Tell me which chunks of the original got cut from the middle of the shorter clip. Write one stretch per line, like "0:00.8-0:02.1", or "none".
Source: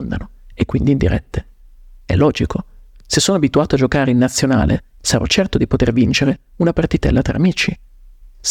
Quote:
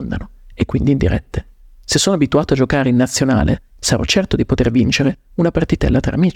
0:01.8-0:03.0